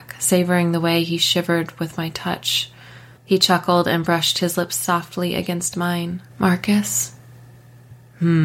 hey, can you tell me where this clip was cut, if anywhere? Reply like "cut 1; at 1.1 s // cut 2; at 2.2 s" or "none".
cut 1; at 3.2 s // cut 2; at 6.3 s